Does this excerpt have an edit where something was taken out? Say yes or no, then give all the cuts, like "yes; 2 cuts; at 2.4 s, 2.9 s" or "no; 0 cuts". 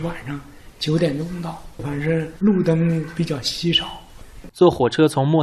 yes; 2 cuts; at 1.8 s, 4.5 s